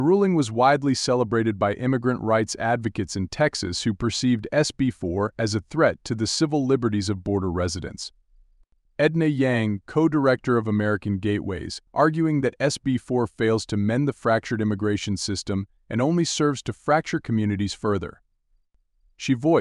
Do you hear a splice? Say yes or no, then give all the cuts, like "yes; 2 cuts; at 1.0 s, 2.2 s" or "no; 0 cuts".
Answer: yes; 2 cuts; at 8.9 s, 11.9 s